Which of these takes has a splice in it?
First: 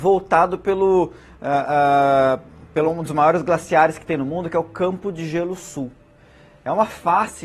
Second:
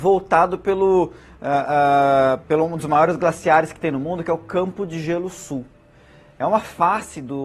second; 1 cut; at 2.4 s

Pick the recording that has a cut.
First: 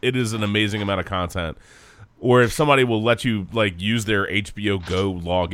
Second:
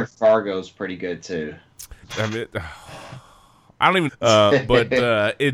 second; 2 cuts; at 2.0 s, 4.1 s

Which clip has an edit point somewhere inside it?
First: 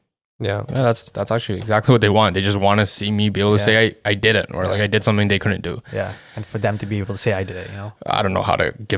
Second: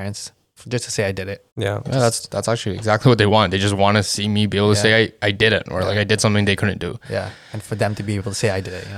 second; 1 cut; at 1.5 s

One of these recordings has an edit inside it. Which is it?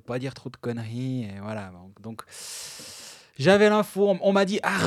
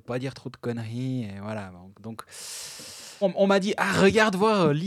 second; 1 cut; at 3.2 s

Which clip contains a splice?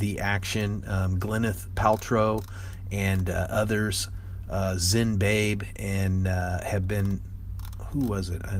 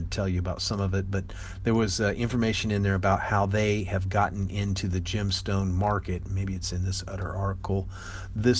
first; 1 cut; at 1.7 s

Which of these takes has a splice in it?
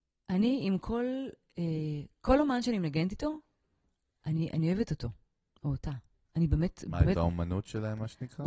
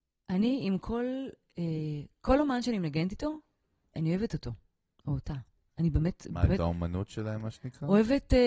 second; 1 cut; at 3.9 s

